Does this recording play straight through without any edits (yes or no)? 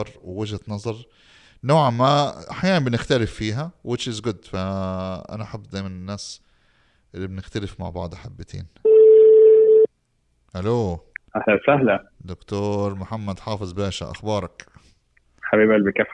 yes